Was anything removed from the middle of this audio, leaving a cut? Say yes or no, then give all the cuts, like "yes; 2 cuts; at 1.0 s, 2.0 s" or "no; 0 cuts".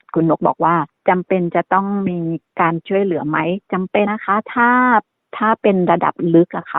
yes; 1 cut; at 4.1 s